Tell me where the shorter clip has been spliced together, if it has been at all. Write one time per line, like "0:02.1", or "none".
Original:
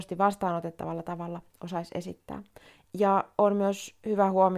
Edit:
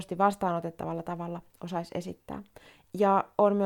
none